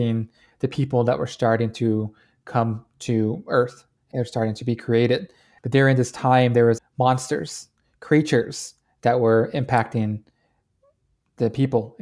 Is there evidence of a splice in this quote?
yes; 2 cuts; at 5.6 s, 6.8 s

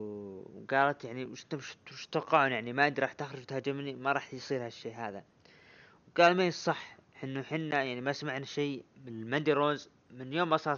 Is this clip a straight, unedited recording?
yes; 0 cuts

